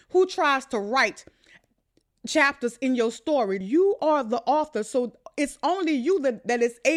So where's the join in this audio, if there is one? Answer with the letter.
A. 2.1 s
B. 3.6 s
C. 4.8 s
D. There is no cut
B